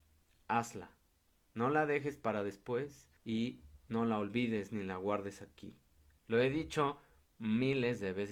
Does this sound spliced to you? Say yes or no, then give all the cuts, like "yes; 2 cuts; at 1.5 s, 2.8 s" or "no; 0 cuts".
yes; 2 cuts; at 3.2 s, 6.2 s